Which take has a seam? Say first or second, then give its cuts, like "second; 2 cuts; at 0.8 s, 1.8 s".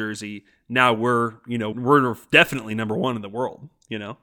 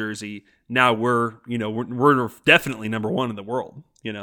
first; 1 cut; at 1.7 s